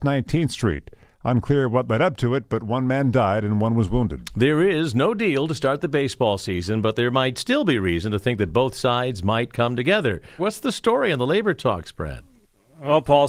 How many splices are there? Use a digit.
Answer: 1